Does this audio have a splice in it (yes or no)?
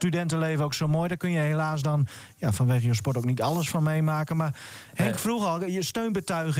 no